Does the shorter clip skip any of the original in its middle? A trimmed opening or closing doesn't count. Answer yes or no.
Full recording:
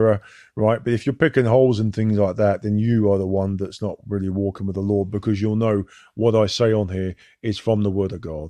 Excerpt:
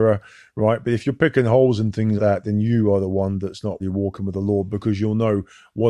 yes